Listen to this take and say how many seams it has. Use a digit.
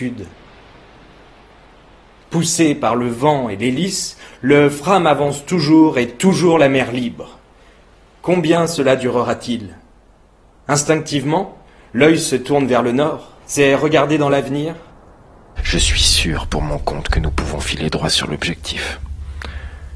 2